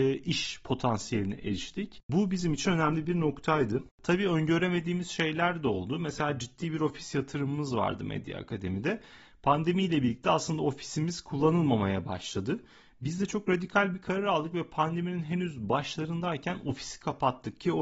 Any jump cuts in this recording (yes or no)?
no